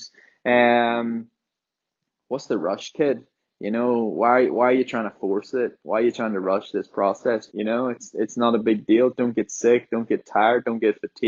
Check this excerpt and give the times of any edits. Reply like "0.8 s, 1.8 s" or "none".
7.5 s